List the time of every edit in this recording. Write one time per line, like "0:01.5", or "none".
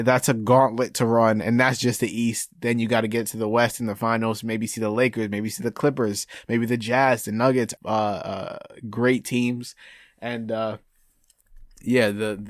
0:07.8